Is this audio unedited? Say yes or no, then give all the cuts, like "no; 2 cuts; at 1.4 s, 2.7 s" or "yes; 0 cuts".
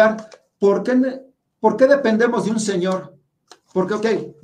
yes; 0 cuts